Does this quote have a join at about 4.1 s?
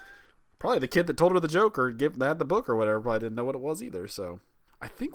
no; 0 cuts

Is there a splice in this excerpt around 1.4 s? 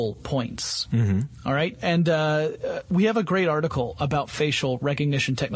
no; 0 cuts

